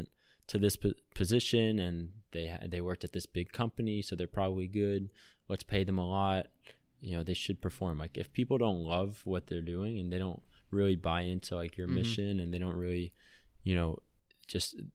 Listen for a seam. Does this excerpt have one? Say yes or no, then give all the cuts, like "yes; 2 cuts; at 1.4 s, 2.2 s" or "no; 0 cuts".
no; 0 cuts